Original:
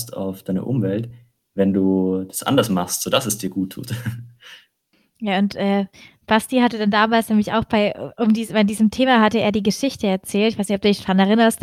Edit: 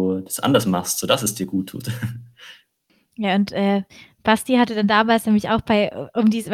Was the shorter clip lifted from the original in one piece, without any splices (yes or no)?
yes